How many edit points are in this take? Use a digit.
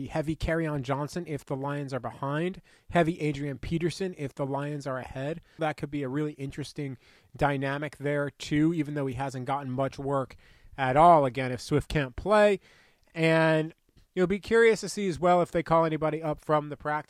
1